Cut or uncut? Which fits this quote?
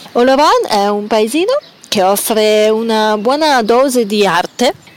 uncut